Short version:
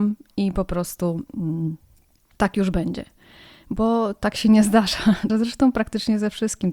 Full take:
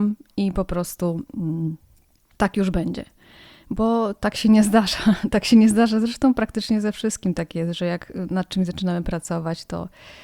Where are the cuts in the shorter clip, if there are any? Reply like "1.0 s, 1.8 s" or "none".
5.3 s